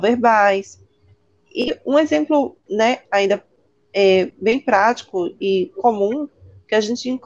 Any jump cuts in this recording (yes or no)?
no